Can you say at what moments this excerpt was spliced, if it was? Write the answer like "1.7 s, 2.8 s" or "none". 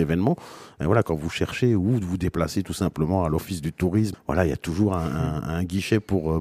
4.1 s